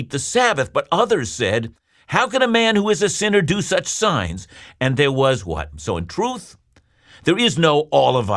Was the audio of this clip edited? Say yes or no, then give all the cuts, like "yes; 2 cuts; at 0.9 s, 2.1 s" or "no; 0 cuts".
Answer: yes; 1 cut; at 5.7 s